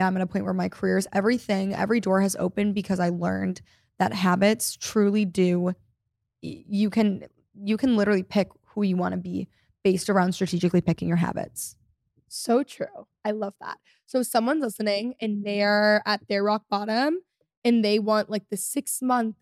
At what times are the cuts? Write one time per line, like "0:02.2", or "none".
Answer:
none